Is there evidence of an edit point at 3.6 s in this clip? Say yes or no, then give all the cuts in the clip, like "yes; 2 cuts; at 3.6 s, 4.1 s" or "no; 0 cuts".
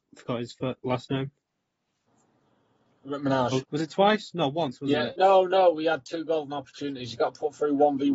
yes; 1 cut; at 3.6 s